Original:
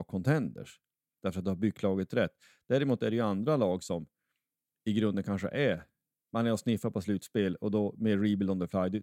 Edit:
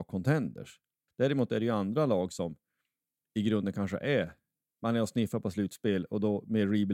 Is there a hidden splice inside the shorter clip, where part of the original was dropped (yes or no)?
yes